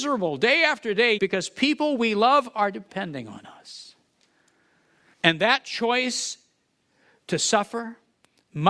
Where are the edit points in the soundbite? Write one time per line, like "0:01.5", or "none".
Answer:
0:01.2
0:05.1